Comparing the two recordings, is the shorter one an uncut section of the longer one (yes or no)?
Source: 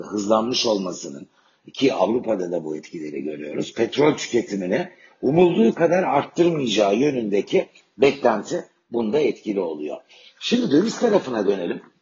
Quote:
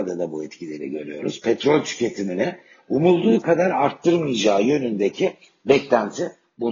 yes